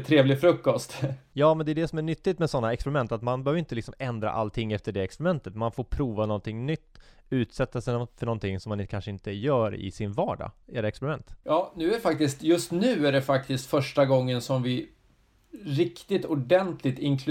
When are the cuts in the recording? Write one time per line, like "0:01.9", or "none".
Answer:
0:10.6